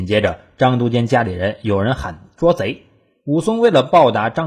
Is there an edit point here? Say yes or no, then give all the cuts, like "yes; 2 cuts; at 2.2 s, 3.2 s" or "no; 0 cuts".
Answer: no; 0 cuts